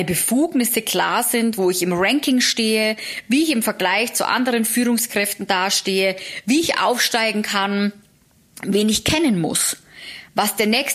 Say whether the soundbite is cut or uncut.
uncut